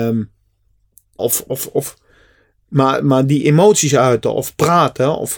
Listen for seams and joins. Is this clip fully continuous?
no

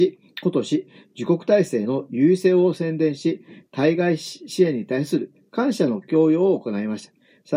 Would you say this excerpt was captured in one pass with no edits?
yes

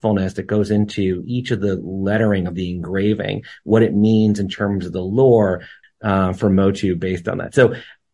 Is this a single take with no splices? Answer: no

